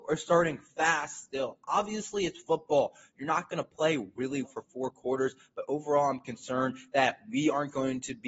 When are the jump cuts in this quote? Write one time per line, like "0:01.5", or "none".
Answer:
0:04.4